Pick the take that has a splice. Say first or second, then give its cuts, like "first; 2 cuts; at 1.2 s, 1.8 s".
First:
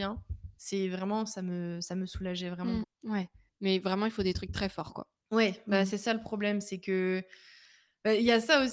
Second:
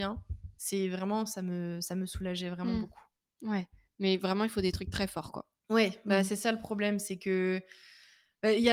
first; 1 cut; at 2.8 s